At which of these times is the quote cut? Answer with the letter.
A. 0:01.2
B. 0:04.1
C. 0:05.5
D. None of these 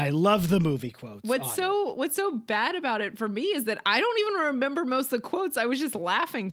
D